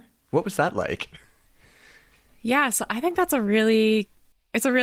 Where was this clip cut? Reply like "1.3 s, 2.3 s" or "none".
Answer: none